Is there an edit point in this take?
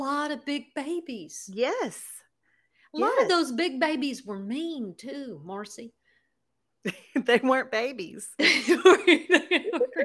no; 0 cuts

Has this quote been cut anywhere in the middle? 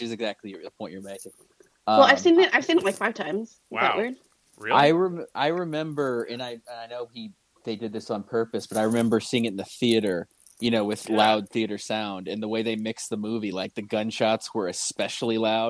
no; 0 cuts

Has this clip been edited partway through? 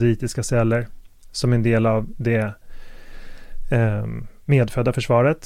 no; 0 cuts

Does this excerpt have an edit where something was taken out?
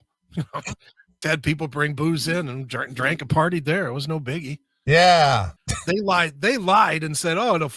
yes; 2 cuts; at 1.2 s, 5.6 s

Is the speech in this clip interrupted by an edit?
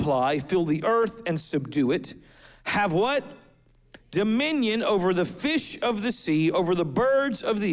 no; 0 cuts

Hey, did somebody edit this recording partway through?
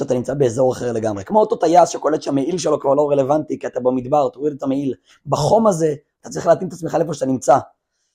no; 0 cuts

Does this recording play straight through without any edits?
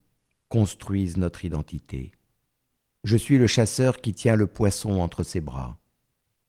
no; 1 cut; at 2.9 s

